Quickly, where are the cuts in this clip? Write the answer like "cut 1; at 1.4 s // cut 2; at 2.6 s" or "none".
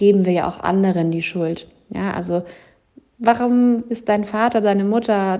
none